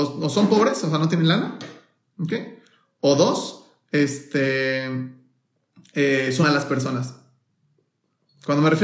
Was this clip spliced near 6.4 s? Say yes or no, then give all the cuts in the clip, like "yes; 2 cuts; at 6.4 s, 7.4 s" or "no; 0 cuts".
yes; 1 cut; at 6.4 s